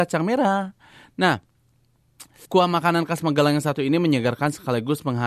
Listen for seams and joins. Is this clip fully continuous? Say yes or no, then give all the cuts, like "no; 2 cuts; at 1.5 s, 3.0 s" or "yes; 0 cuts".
no; 1 cut; at 2.5 s